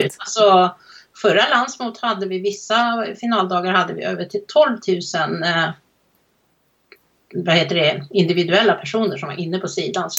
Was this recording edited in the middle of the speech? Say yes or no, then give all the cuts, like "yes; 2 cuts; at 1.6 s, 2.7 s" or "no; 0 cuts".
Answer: no; 0 cuts